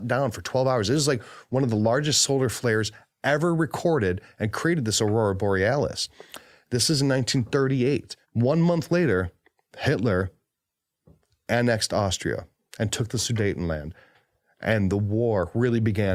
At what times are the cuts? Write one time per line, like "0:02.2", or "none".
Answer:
0:08.2